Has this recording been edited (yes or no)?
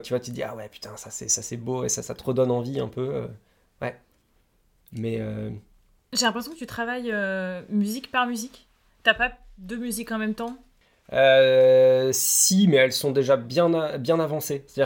no